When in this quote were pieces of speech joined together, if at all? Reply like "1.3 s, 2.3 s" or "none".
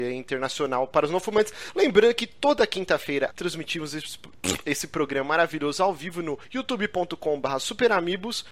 3.3 s